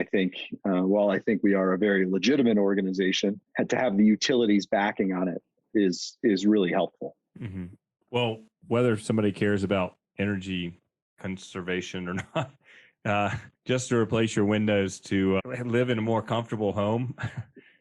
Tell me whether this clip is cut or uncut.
cut